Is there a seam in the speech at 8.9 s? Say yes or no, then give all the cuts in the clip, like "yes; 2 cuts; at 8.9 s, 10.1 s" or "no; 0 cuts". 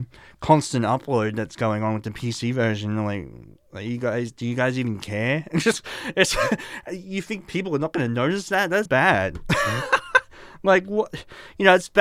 yes; 1 cut; at 8.9 s